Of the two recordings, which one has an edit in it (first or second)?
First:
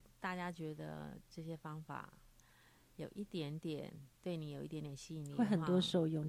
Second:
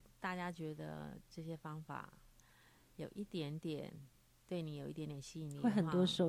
first